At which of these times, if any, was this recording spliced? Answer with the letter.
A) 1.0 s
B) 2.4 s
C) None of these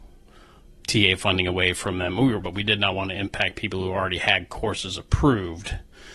B